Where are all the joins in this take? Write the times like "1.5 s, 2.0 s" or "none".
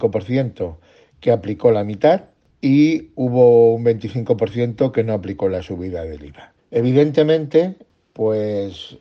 6.6 s